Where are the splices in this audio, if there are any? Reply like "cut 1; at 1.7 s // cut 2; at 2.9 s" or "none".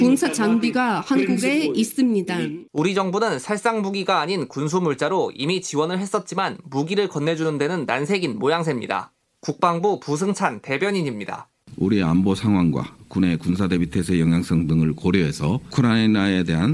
cut 1; at 2.7 s

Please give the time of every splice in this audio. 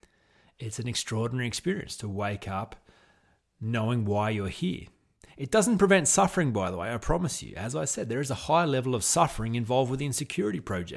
none

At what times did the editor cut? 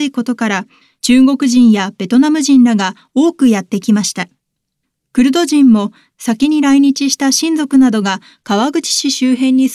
none

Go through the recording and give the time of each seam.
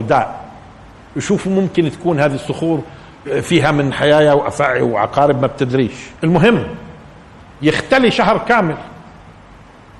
cut 1; at 6.2 s

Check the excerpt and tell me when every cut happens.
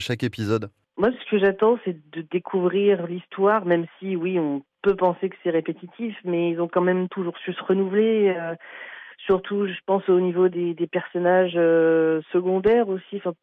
none

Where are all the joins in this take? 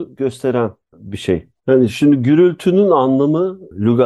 cut 1; at 1.6 s

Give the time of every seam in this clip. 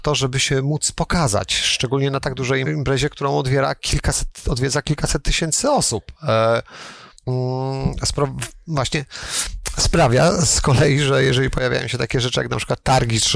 cut 1; at 2.6 s // cut 2; at 7.1 s

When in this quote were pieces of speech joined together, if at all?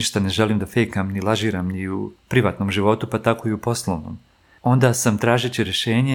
none

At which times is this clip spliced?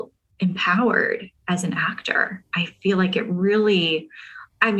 none

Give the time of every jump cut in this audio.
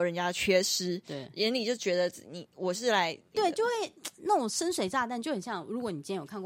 cut 1; at 3.3 s // cut 2; at 5.2 s

